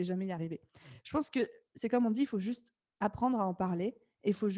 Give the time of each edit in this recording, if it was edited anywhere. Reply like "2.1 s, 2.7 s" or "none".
none